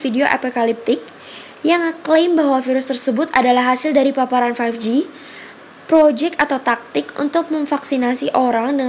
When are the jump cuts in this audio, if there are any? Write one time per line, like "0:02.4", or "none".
none